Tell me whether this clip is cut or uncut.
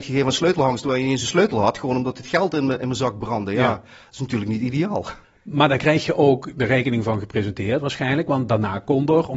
uncut